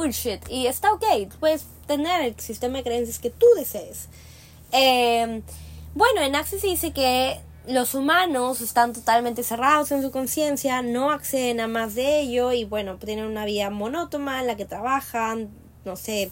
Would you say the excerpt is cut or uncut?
uncut